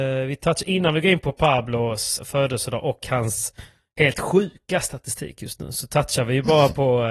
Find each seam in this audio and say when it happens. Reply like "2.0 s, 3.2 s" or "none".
2.2 s